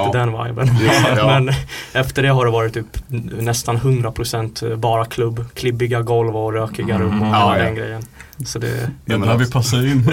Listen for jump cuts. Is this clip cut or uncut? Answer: uncut